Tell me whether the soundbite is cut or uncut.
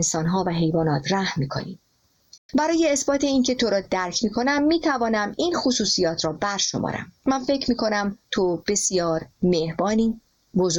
cut